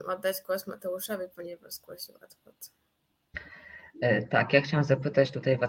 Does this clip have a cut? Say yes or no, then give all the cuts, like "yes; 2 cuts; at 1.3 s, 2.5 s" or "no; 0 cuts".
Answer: no; 0 cuts